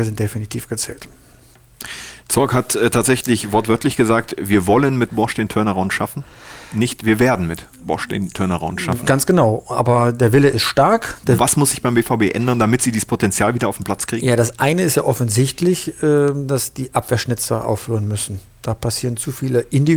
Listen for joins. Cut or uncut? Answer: cut